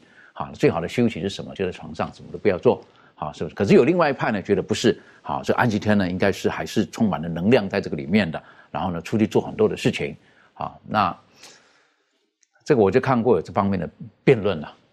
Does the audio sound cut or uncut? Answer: uncut